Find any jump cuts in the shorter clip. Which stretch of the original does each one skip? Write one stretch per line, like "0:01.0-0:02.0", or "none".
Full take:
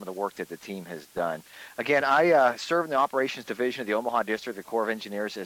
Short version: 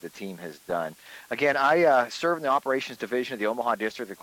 none